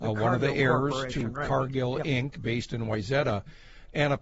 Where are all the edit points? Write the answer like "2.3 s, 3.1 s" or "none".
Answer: none